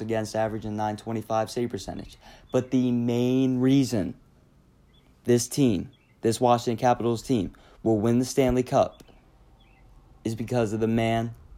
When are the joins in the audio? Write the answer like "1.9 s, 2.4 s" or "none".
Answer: none